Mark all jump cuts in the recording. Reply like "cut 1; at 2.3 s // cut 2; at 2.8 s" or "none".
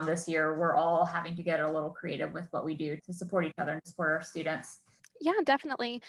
cut 1; at 3.0 s // cut 2; at 5.0 s